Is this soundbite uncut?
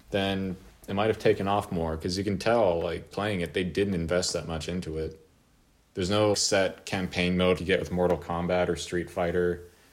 no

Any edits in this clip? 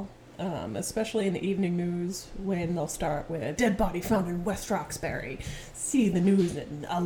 yes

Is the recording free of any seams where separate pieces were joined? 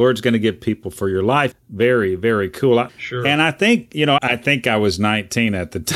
no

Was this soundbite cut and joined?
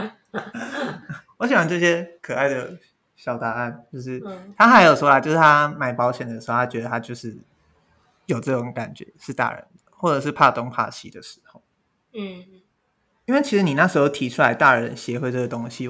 no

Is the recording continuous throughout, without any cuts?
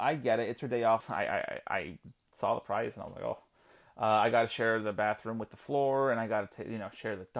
no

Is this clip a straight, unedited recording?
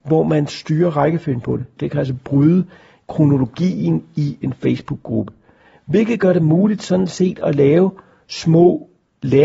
no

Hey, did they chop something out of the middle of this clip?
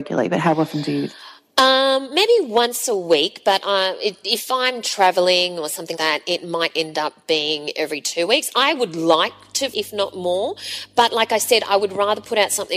yes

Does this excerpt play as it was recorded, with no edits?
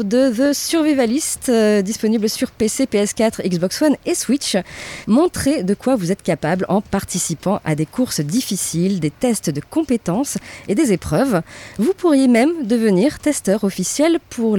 no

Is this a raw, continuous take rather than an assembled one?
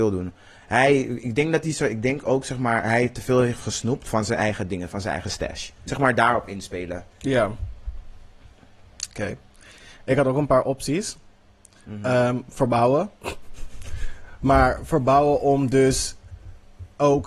no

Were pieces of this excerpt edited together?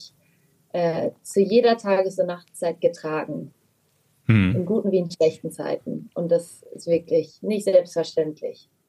no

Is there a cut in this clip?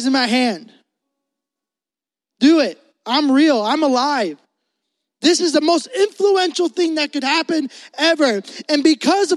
no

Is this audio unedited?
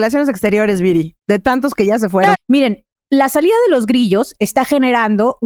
no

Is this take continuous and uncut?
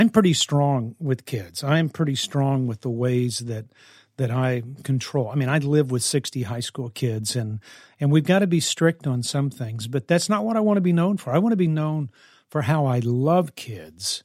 yes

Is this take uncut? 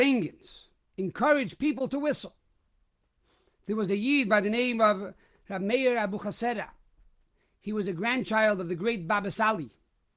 yes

